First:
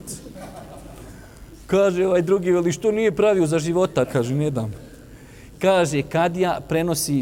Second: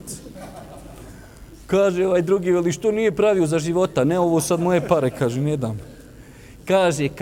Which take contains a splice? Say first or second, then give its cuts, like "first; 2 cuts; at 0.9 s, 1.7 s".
first; 1 cut; at 4.0 s